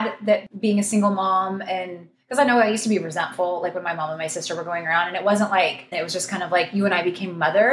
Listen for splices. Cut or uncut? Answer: cut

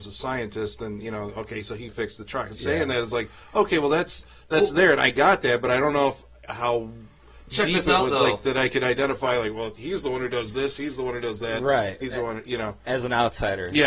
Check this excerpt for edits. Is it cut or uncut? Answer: cut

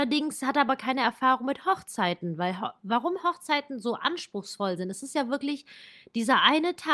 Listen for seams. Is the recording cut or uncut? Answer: uncut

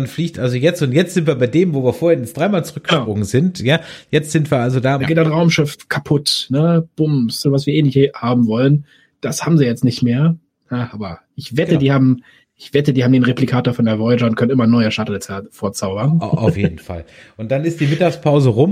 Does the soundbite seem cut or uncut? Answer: cut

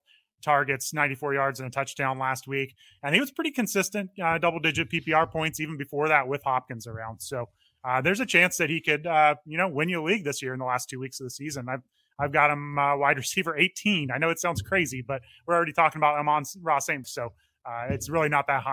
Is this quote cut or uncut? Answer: cut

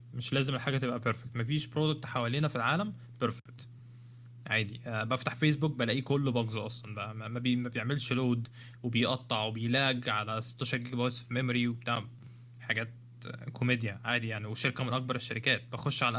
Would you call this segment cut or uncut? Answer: uncut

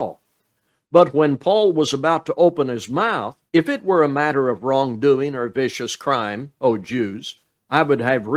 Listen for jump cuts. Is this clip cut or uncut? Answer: cut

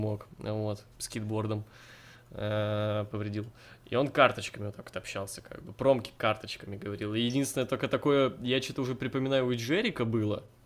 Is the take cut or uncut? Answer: uncut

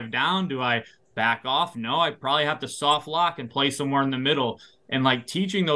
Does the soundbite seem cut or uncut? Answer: uncut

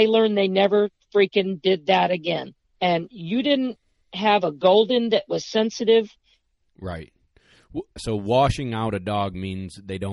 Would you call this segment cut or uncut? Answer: cut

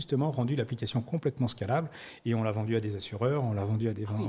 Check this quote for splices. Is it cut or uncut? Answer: uncut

